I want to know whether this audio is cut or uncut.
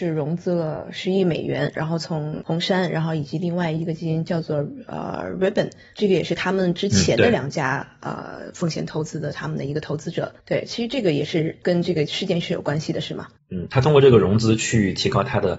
cut